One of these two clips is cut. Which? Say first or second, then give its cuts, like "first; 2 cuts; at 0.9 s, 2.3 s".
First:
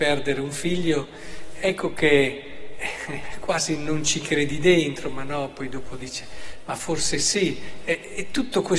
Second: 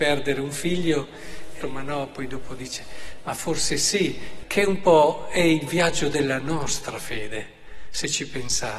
second; 2 cuts; at 1.6 s, 4.4 s